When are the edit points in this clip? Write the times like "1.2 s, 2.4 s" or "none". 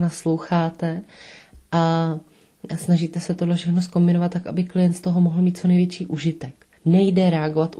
6.7 s